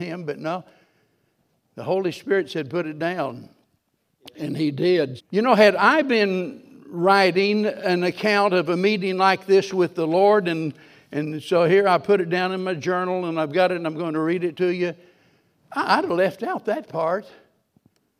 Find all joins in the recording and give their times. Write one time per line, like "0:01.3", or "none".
0:05.2